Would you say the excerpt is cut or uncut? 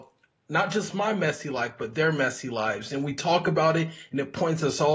uncut